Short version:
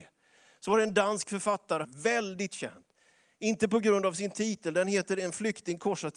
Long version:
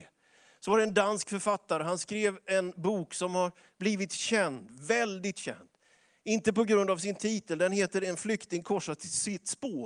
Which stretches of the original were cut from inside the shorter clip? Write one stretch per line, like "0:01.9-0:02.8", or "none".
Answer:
0:01.8-0:04.7